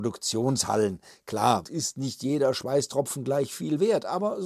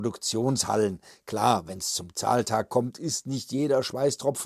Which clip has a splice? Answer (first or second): first